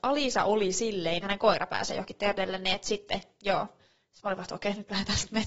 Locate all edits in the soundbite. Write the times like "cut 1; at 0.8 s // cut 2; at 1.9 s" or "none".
cut 1; at 1.2 s